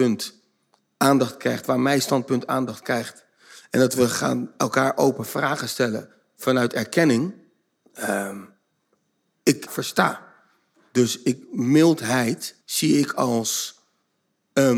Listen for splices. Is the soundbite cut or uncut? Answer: cut